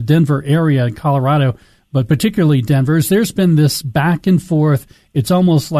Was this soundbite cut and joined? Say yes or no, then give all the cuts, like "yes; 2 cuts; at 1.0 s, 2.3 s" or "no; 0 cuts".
no; 0 cuts